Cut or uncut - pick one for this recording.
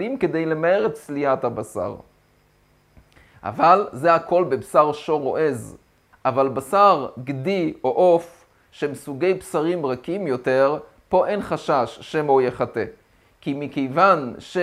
cut